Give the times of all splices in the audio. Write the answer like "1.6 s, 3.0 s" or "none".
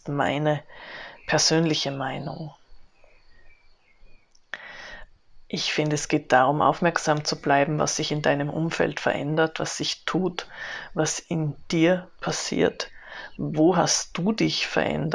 13.4 s